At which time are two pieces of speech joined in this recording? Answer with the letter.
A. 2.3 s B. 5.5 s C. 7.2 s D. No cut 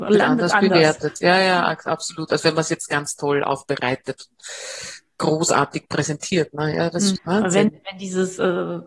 C